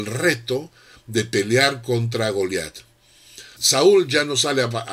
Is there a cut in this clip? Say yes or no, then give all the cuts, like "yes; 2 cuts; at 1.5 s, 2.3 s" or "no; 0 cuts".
yes; 1 cut; at 3.6 s